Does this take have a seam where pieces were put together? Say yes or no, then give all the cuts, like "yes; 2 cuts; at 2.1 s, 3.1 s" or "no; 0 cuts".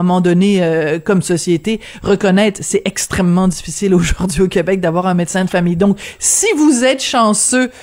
no; 0 cuts